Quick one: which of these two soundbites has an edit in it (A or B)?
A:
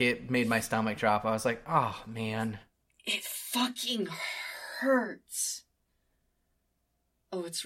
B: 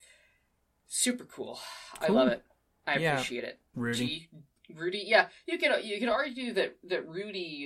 B